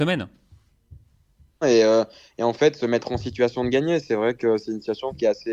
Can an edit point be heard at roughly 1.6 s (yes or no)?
yes